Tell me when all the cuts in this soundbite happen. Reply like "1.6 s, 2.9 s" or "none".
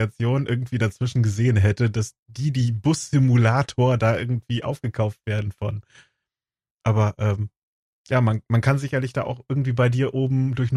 none